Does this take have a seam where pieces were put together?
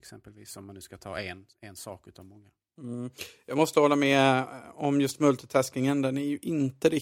no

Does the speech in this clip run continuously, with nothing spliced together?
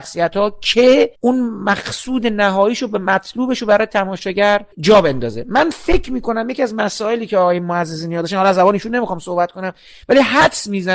no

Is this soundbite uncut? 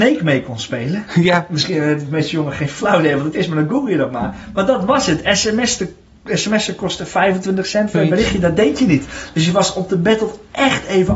no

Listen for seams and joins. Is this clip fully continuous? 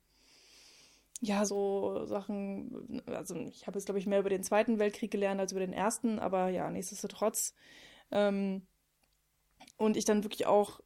no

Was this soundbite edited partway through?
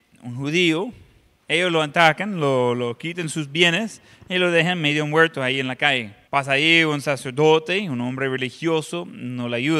yes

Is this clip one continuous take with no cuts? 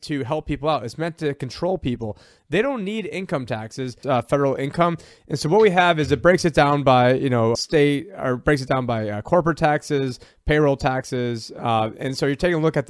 no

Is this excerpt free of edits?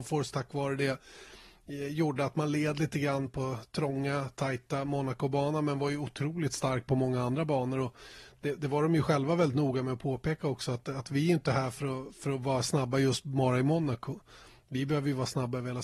yes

